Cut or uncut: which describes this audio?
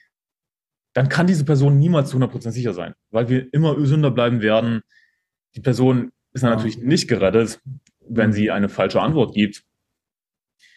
uncut